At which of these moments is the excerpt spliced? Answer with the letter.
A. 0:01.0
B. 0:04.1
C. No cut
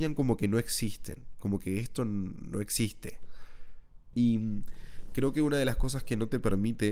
B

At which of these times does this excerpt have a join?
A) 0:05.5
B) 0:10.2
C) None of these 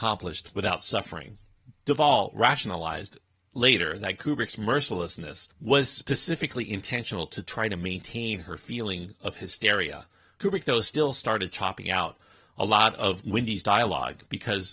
A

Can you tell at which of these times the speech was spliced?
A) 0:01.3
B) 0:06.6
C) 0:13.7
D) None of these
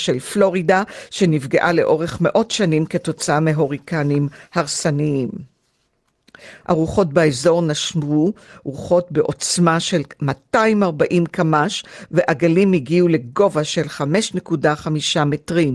B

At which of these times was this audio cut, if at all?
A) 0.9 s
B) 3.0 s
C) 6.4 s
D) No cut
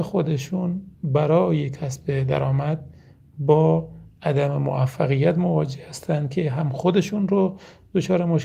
A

